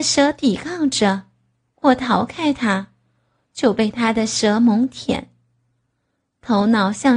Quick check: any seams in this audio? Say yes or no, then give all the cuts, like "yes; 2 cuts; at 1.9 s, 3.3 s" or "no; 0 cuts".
yes; 1 cut; at 1.7 s